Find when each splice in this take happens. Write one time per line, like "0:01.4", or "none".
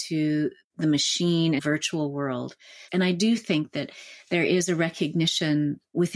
0:01.6
0:02.9